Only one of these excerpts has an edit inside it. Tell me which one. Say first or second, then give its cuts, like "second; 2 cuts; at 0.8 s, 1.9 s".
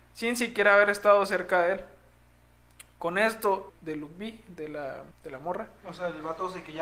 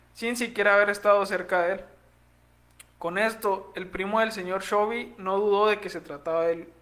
first; 2 cuts; at 3.7 s, 5.1 s